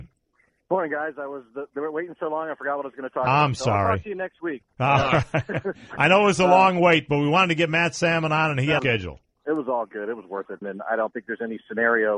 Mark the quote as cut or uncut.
cut